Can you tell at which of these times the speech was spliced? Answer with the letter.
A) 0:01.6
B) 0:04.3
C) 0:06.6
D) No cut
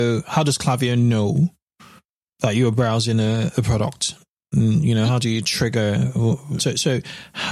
C